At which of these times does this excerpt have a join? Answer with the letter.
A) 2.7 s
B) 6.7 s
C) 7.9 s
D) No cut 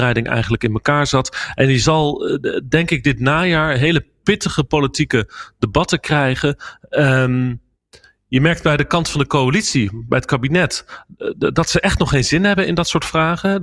D